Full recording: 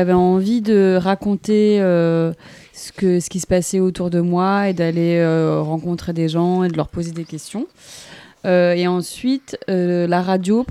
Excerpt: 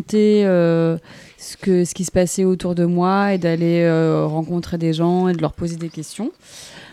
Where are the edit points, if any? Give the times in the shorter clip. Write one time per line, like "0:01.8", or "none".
none

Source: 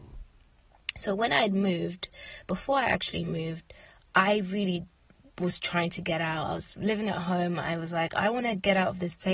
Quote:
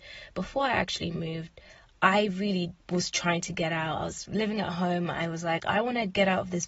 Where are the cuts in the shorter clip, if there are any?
0:02.8

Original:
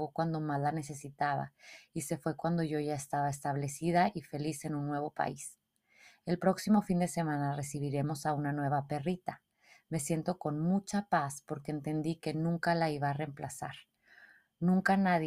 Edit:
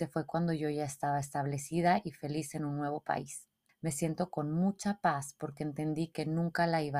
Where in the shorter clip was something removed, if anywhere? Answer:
0:03.7

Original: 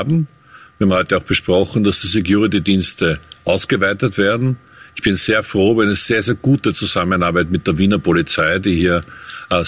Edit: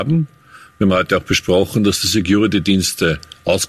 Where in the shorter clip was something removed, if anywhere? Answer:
none

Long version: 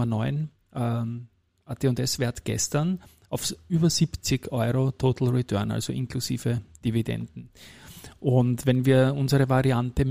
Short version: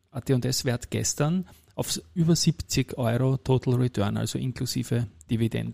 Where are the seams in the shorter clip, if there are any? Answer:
none

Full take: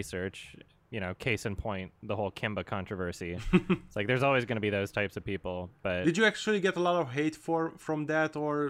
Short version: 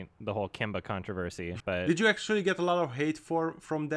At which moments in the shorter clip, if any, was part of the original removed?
0:01.6

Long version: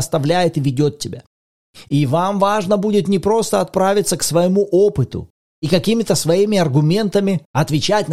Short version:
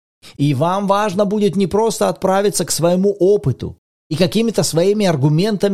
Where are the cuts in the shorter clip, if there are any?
none

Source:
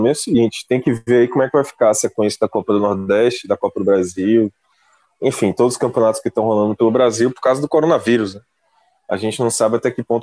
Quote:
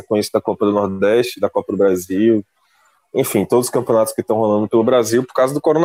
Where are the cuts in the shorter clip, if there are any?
none

